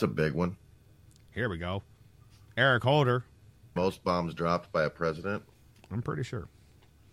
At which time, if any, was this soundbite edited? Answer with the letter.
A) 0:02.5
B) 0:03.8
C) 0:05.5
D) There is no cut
B